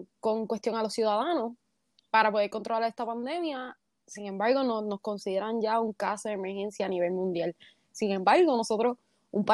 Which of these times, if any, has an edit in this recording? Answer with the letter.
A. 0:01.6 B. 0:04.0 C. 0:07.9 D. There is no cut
C